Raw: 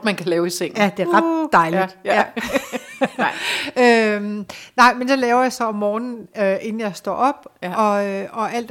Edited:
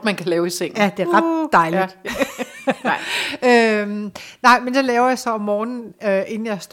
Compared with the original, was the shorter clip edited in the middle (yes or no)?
yes